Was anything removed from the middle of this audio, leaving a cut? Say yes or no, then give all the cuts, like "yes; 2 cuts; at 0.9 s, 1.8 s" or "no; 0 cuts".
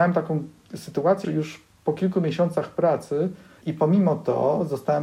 yes; 2 cuts; at 1.2 s, 3.6 s